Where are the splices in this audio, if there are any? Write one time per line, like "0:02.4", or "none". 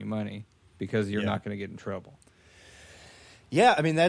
none

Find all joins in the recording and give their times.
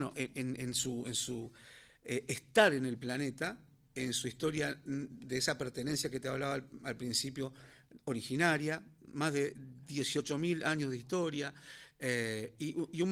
none

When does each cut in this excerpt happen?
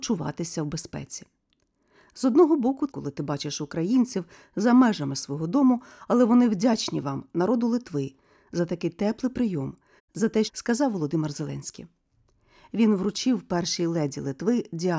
0:02.9
0:10.5

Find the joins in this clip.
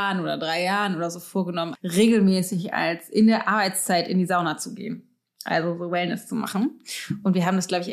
0:01.7

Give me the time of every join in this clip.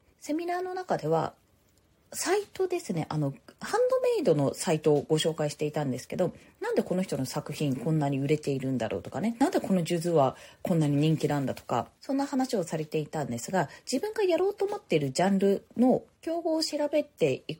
none

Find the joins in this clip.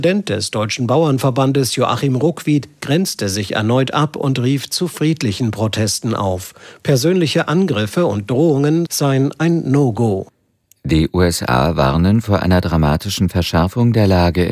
0:08.9

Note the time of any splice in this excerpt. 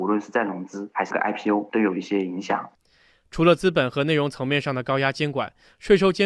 none

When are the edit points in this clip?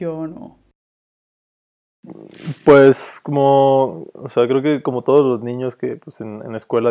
none

